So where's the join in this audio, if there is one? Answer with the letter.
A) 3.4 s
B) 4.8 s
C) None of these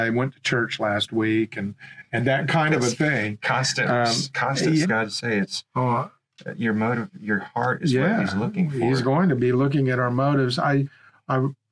B